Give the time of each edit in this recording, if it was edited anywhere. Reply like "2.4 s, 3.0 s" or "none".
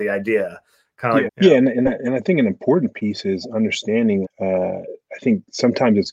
1.3 s, 4.2 s